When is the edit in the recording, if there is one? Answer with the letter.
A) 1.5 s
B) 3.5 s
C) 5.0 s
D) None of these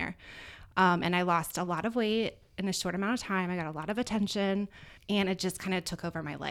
C